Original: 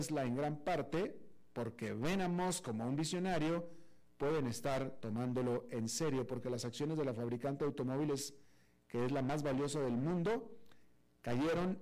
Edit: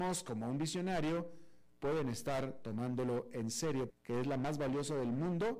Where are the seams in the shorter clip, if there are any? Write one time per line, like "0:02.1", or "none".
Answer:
0:03.9